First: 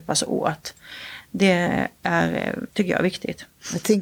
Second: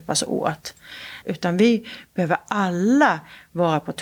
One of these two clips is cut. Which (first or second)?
second